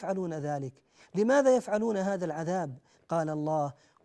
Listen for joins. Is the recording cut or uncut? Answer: cut